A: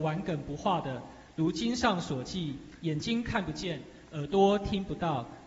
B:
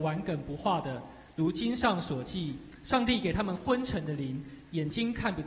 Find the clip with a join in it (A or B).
A